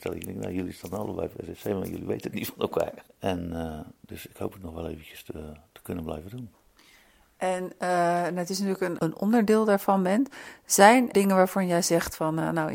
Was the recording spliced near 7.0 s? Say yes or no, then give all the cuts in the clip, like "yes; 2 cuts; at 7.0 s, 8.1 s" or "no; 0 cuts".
no; 3 cuts; at 3.1 s, 9.0 s, 11.1 s